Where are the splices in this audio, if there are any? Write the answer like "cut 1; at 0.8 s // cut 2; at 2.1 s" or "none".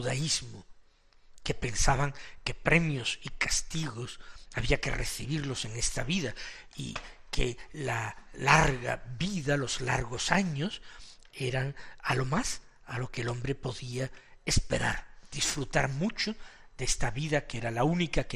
none